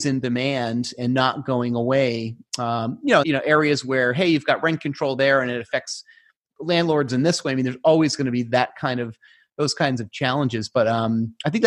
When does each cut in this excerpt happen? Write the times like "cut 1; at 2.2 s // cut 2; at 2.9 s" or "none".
cut 1; at 3.2 s